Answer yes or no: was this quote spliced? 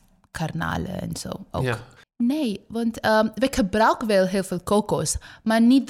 yes